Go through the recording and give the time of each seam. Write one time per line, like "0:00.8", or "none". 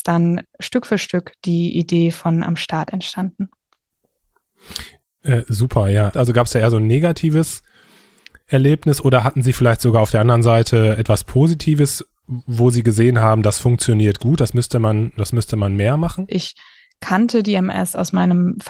0:06.1
0:16.3